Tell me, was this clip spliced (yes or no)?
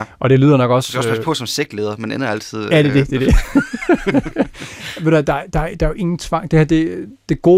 no